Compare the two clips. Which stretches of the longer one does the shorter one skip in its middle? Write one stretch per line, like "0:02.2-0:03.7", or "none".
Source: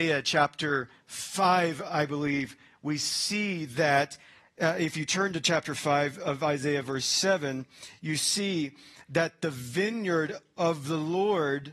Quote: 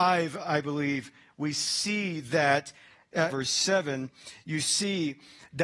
0:04.7-0:06.8